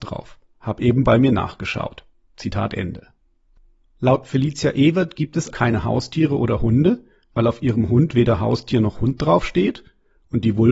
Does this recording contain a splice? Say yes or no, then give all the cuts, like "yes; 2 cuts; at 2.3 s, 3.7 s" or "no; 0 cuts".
yes; 1 cut; at 5.5 s